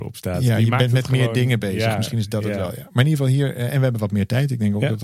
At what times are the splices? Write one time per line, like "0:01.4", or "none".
none